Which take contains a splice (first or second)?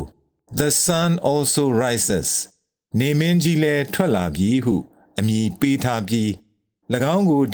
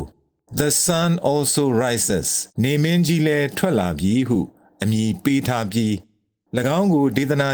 second